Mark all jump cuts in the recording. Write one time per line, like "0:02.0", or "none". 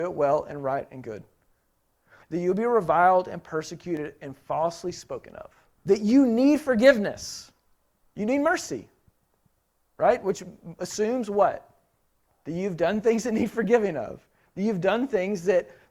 0:02.2
0:05.8